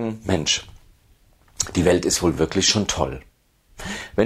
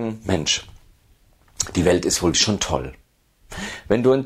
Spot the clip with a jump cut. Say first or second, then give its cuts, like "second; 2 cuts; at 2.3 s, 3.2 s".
second; 1 cut; at 2.3 s